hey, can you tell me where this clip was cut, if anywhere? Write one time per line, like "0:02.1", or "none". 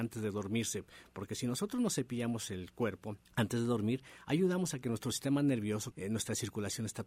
0:03.3
0:05.9